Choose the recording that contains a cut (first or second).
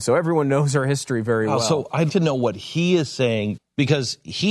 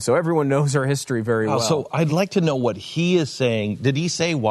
first